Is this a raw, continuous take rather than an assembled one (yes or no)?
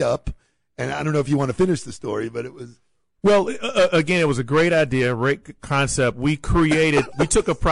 yes